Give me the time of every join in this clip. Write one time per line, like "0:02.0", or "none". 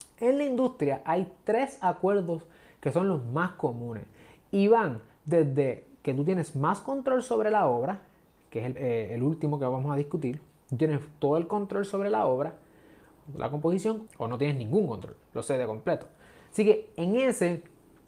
0:08.8
0:14.1